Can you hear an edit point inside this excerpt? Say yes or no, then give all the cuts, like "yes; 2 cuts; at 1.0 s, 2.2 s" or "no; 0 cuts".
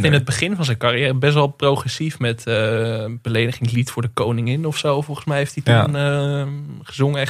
no; 0 cuts